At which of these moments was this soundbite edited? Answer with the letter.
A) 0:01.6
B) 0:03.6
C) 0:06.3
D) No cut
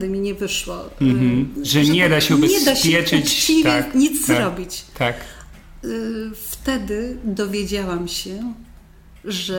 A